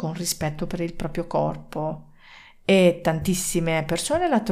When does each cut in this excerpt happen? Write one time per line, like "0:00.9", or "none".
none